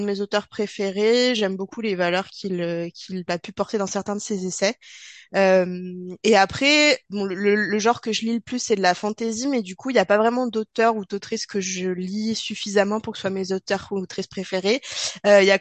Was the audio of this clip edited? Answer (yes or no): no